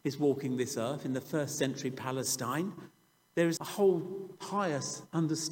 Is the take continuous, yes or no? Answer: no